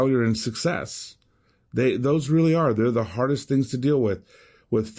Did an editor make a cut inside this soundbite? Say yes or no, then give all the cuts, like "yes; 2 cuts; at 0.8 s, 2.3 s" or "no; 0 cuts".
no; 0 cuts